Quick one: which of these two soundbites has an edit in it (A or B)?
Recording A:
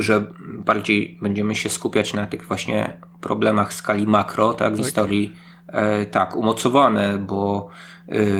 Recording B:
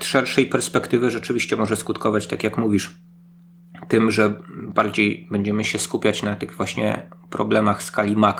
A